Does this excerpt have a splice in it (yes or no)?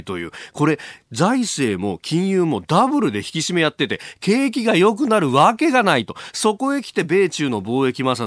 no